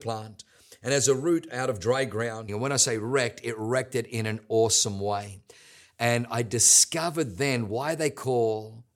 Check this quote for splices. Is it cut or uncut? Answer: cut